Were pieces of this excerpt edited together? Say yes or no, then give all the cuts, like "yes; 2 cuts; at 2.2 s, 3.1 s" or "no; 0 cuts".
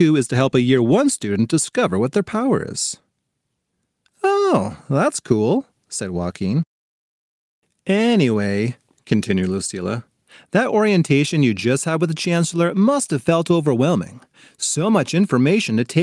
no; 0 cuts